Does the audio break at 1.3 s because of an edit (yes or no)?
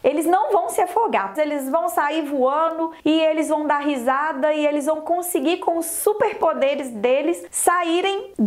yes